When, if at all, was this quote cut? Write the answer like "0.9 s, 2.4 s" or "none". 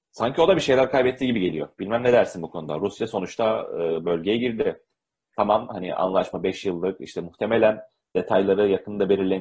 none